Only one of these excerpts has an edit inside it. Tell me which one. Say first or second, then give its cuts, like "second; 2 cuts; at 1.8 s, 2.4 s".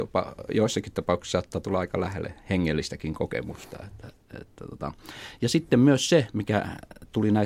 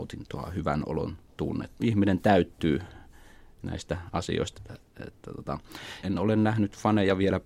second; 3 cuts; at 1.8 s, 4.5 s, 6.0 s